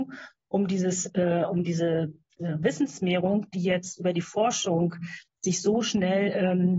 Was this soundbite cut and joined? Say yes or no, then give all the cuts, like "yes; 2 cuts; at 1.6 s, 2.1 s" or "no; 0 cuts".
no; 0 cuts